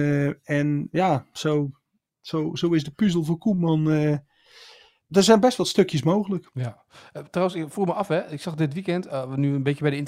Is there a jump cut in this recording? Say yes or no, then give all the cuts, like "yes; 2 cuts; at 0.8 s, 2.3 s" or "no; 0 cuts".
no; 0 cuts